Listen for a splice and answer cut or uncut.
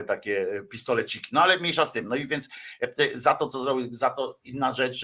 uncut